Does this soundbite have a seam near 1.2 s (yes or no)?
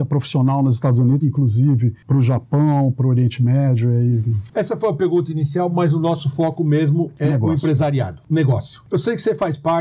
yes